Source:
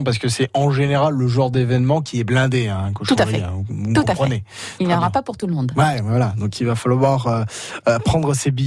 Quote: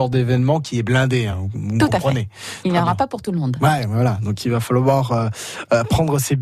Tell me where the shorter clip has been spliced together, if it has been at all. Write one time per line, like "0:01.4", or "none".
0:01.3